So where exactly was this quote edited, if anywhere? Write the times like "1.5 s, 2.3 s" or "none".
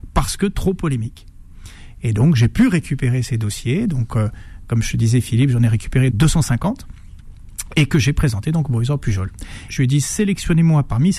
6.1 s, 9.7 s